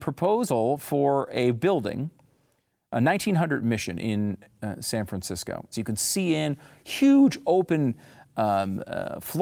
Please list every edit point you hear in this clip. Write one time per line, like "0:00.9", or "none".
0:05.7